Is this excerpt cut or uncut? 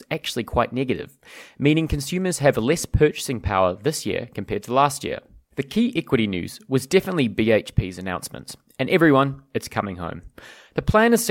cut